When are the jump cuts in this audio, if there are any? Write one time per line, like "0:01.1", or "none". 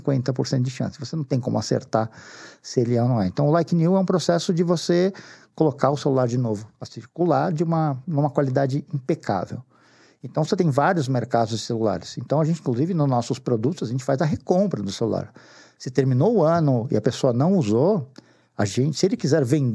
none